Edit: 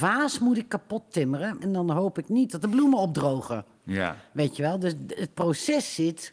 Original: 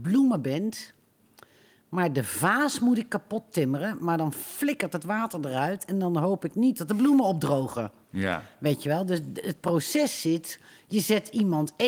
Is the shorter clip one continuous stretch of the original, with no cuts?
no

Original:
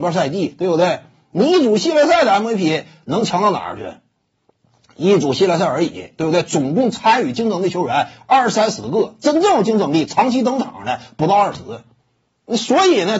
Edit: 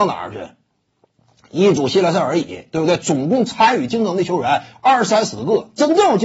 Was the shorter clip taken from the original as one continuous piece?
yes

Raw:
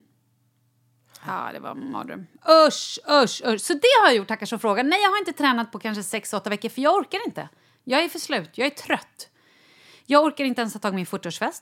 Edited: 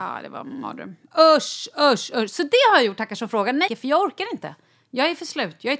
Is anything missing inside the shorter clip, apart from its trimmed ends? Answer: yes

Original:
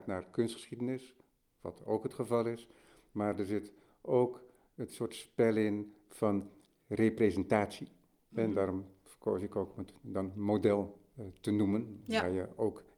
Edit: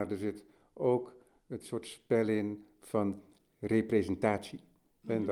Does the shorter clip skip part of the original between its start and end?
no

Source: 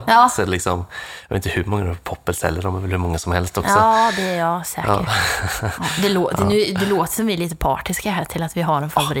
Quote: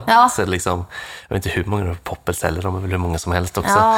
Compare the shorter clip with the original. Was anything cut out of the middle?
no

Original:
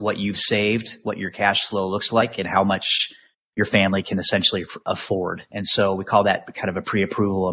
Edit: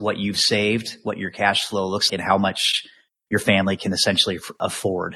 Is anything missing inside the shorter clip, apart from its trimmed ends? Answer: yes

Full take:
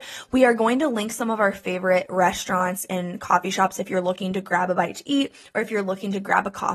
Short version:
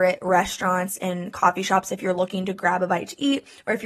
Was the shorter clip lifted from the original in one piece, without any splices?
yes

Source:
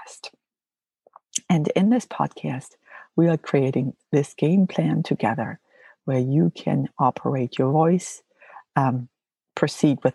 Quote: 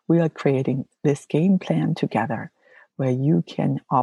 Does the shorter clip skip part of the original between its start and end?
no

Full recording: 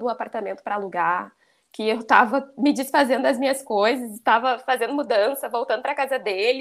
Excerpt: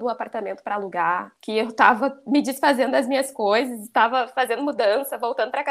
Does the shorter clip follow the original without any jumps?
no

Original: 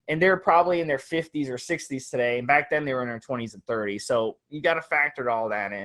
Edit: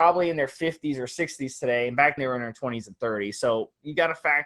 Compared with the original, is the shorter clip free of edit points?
no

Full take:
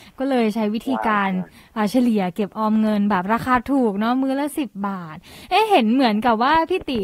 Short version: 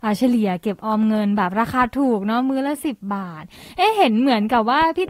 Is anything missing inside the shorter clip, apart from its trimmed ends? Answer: no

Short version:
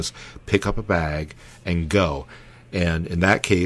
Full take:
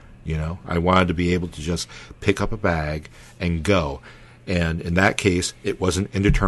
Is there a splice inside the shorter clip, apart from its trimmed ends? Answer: no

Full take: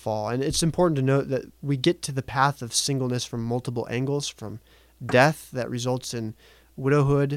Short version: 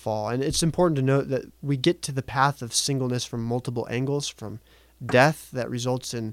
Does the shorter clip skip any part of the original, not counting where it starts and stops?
no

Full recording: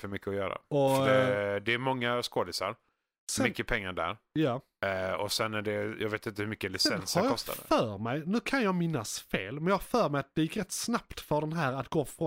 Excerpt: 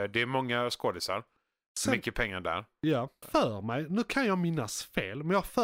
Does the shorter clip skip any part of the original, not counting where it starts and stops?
yes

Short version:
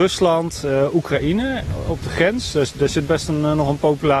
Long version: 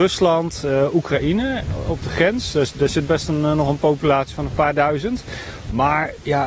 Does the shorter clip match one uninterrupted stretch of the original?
yes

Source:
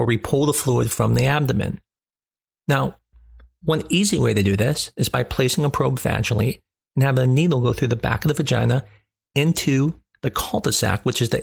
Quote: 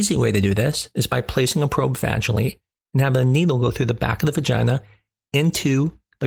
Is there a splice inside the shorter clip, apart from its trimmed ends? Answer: no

